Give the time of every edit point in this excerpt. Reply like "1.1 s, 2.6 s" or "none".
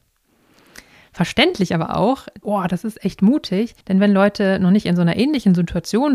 2.4 s, 3.8 s